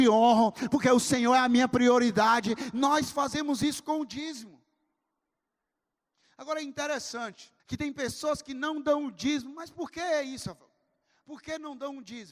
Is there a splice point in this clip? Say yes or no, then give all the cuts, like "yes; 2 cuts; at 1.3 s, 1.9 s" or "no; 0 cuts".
yes; 1 cut; at 7.6 s